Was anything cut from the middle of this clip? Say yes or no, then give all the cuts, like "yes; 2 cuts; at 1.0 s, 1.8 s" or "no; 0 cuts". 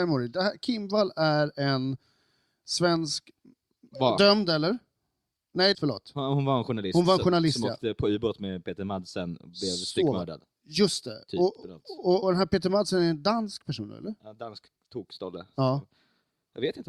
yes; 2 cuts; at 5.7 s, 12.2 s